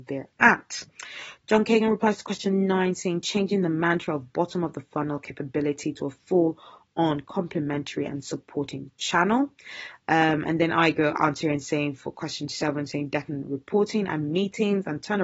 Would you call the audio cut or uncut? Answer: uncut